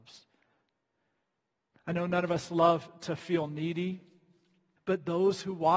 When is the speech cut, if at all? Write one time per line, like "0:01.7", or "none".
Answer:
0:04.8